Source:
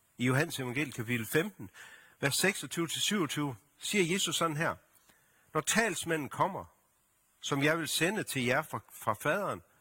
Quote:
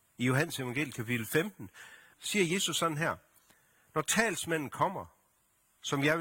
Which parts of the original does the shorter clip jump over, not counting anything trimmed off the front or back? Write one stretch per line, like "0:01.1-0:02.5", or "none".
0:02.1-0:03.7